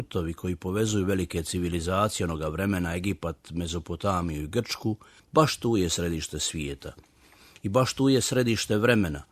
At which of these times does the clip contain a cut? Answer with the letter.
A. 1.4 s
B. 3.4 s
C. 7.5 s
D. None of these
D